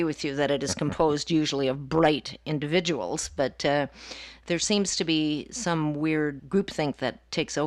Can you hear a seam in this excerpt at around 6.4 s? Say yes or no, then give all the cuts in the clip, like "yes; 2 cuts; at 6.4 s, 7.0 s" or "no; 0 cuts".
yes; 1 cut; at 6.4 s